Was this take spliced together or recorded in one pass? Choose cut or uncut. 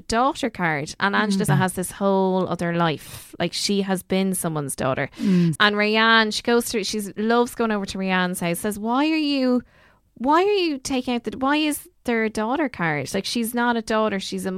cut